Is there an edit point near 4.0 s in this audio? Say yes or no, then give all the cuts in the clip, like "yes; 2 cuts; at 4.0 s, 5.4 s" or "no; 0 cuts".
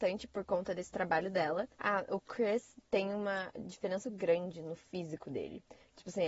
yes; 2 cuts; at 1.7 s, 4.0 s